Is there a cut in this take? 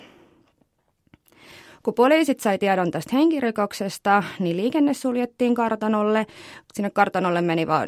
no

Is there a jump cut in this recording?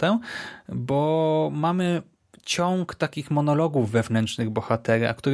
no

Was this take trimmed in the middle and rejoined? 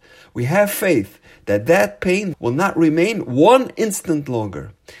yes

